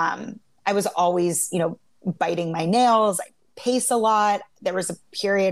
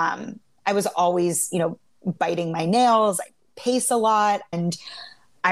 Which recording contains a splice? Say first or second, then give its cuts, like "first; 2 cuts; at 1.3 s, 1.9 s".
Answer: second; 1 cut; at 4.5 s